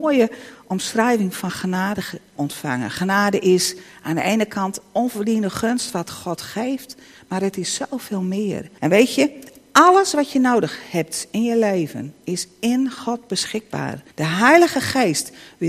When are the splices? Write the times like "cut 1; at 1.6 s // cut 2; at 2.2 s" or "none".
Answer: cut 1; at 2.4 s // cut 2; at 8.8 s // cut 3; at 14.1 s